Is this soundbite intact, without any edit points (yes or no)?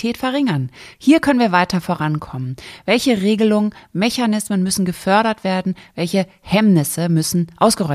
yes